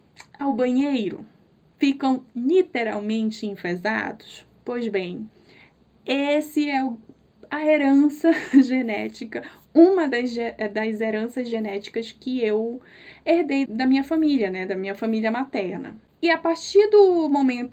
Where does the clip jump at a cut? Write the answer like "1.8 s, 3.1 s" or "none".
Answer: 13.7 s